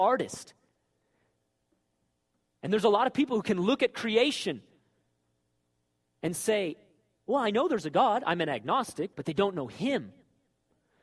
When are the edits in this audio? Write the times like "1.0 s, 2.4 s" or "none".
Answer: 9.1 s